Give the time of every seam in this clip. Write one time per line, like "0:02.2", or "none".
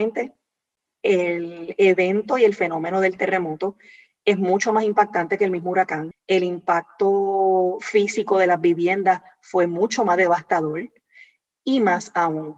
0:06.1